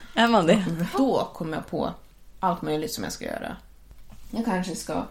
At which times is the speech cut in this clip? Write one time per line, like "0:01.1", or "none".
0:00.9